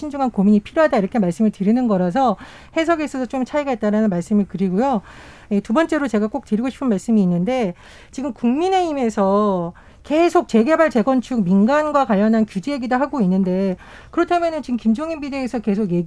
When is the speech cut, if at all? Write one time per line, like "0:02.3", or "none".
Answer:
none